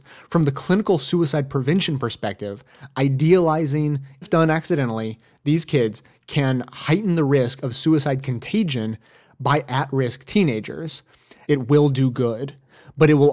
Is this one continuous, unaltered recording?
no; 2 cuts; at 4.2 s, 11.5 s

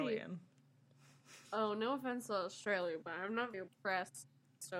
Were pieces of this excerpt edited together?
yes; 2 cuts; at 1.5 s, 3.5 s

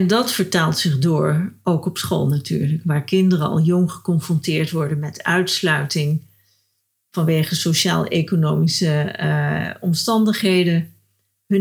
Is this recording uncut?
yes; 0 cuts

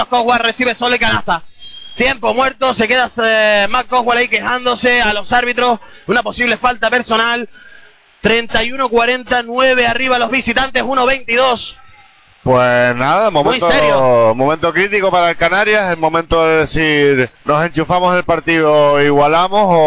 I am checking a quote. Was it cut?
yes; 1 cut; at 17.3 s

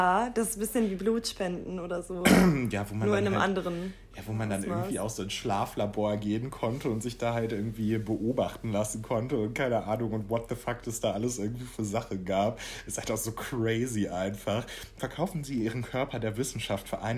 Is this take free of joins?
yes; 0 cuts

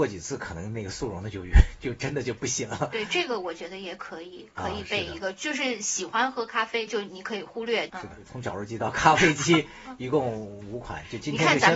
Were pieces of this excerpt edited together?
yes; 2 cuts; at 6.9 s, 7.9 s

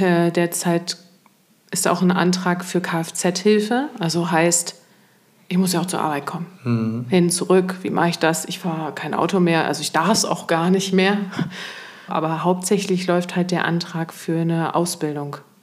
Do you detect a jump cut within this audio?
yes; 1 cut; at 12.1 s

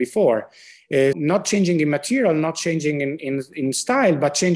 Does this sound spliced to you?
yes; 1 cut; at 1.1 s

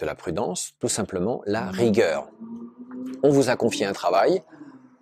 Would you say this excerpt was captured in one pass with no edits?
yes; 0 cuts

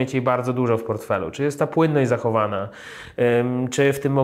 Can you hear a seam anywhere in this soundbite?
no; 0 cuts

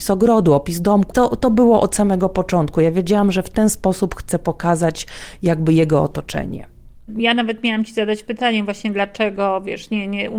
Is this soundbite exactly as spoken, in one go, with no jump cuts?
no; 1 cut; at 1.1 s

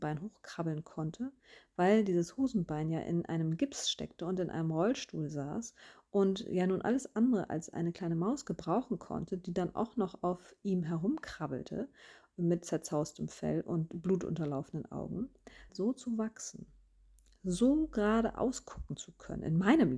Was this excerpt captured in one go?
no; 1 cut; at 15.7 s

